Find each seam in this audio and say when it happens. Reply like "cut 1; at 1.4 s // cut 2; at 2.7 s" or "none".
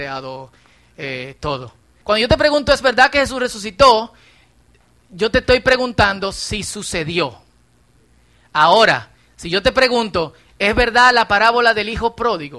cut 1; at 2.0 s